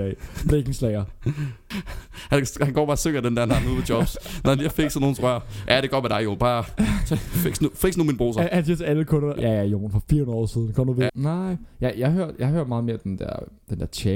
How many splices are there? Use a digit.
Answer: 2